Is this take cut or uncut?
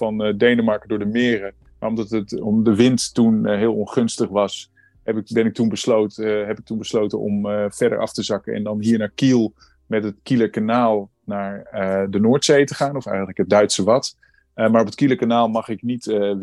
uncut